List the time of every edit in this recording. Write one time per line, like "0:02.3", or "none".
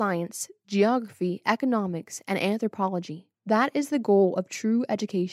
0:03.3